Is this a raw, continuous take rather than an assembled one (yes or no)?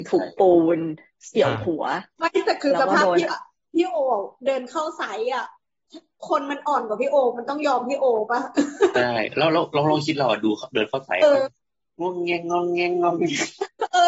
no